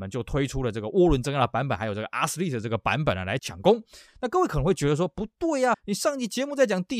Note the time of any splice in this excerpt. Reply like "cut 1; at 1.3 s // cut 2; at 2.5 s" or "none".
cut 1; at 3.4 s // cut 2; at 5.7 s